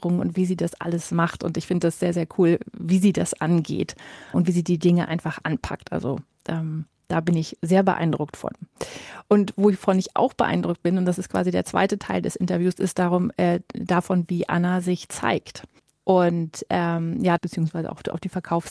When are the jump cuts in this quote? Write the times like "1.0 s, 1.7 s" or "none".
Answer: 4.3 s, 15.9 s, 17.4 s